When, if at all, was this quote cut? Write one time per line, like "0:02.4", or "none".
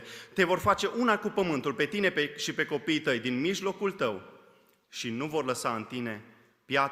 none